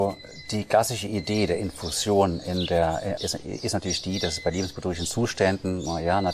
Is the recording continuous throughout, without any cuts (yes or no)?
no